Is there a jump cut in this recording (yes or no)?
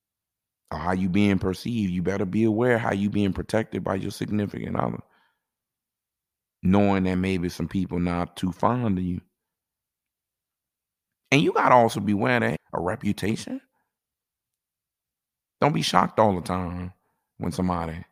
yes